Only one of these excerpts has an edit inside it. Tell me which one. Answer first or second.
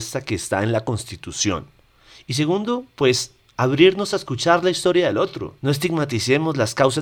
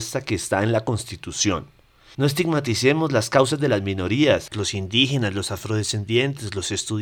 second